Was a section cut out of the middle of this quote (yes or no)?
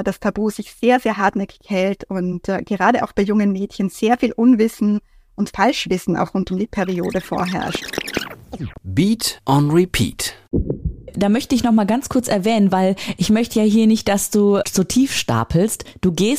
no